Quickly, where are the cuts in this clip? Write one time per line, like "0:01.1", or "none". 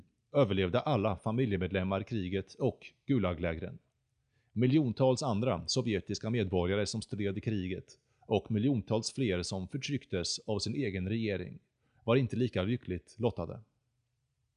none